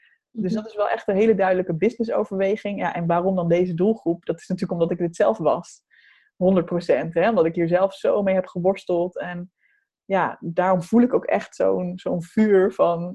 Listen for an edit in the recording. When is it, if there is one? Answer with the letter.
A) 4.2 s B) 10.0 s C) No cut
C